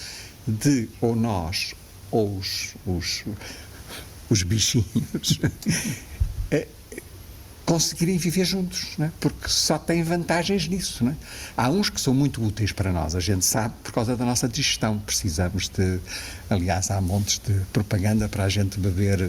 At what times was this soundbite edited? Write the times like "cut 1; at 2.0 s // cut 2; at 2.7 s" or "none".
cut 1; at 0.9 s